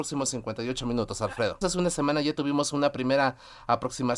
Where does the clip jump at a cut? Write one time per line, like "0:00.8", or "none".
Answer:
0:01.6

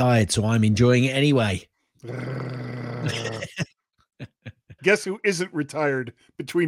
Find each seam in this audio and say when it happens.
0:04.8

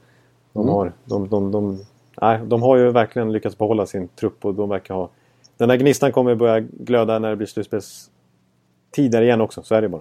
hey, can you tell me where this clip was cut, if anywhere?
none

